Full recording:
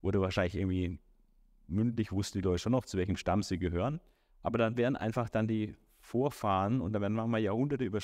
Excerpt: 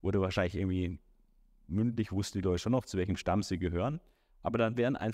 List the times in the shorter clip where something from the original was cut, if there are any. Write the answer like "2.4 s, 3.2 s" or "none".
none